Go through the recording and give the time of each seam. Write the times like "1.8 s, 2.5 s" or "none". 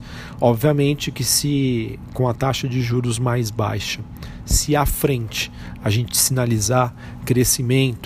none

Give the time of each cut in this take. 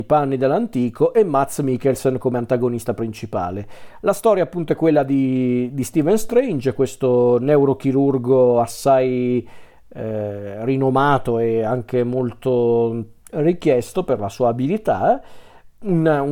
none

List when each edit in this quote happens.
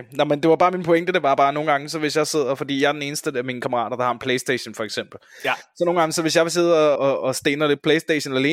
7.0 s

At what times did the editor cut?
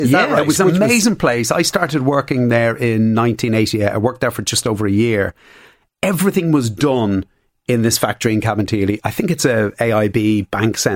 none

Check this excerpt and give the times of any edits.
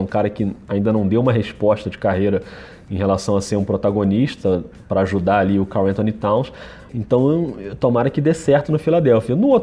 6.9 s

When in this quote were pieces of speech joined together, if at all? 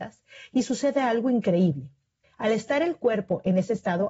2.2 s

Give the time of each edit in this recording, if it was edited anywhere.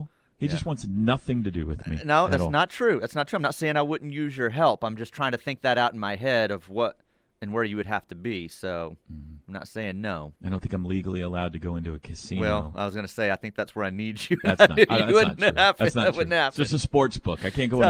10.4 s

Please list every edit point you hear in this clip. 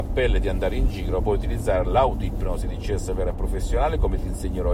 1.2 s

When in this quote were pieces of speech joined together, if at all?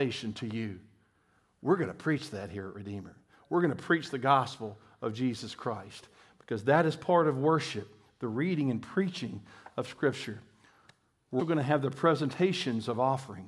11.4 s

